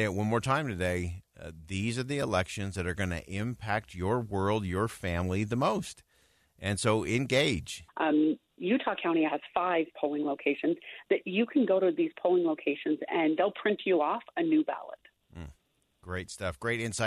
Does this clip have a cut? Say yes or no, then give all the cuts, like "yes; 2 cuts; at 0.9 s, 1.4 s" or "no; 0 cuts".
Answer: yes; 2 cuts; at 7.9 s, 9.3 s